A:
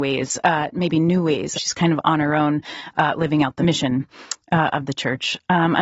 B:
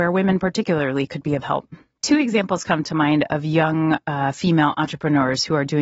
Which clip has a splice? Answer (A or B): A